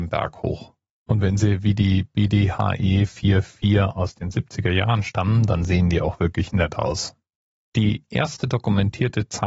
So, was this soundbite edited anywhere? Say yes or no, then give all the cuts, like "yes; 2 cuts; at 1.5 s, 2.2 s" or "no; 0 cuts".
yes; 2 cuts; at 0.9 s, 7.6 s